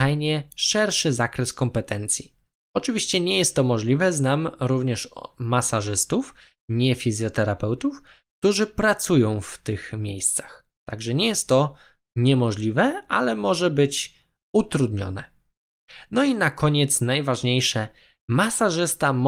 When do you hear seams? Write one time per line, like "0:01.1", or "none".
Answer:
none